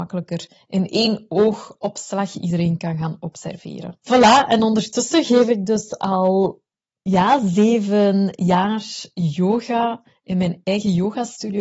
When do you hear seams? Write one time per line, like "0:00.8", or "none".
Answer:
0:04.0